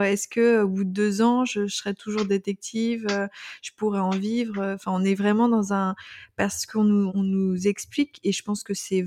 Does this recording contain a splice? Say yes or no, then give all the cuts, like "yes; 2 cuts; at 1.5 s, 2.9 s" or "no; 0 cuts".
yes; 1 cut; at 7.1 s